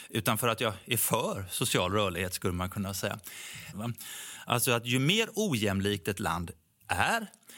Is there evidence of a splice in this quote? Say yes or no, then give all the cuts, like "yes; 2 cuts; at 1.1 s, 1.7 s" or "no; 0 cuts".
yes; 1 cut; at 3.7 s